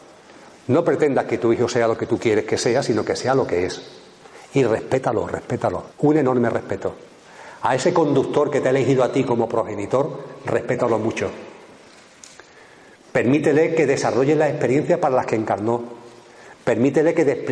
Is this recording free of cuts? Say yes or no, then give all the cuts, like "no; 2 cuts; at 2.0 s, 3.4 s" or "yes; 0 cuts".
no; 1 cut; at 5.9 s